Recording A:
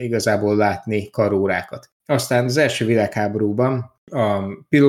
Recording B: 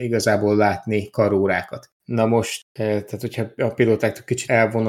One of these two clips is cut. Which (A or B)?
B